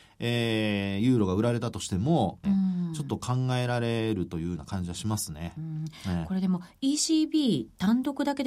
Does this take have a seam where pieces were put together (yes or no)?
yes